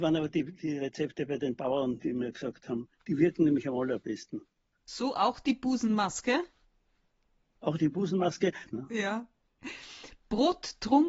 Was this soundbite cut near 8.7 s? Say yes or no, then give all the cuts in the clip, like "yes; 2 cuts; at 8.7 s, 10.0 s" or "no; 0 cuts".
yes; 2 cuts; at 2.0 s, 8.7 s